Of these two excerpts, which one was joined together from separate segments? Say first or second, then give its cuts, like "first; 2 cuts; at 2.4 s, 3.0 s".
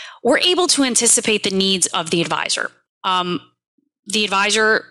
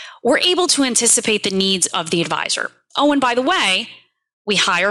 first; 1 cut; at 2.9 s